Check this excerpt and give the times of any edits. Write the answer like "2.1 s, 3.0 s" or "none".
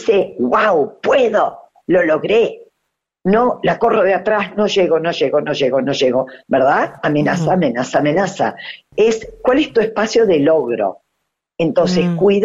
none